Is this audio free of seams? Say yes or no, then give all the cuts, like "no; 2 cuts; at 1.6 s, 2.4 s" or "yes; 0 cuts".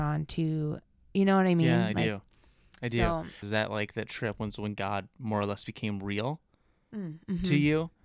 no; 1 cut; at 3.4 s